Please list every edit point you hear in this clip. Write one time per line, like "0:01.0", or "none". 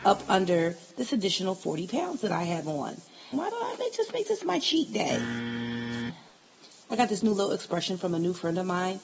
0:03.3
0:06.9